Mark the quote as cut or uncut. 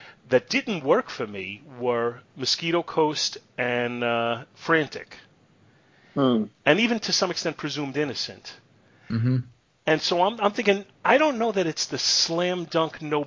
uncut